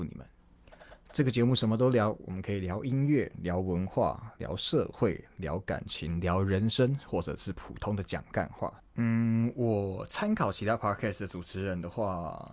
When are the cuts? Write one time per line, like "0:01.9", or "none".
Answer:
0:08.8

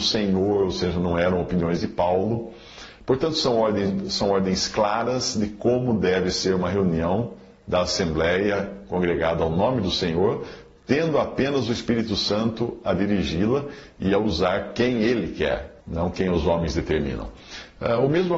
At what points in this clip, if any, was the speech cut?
0:15.8

